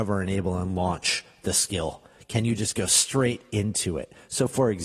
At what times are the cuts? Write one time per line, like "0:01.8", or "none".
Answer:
none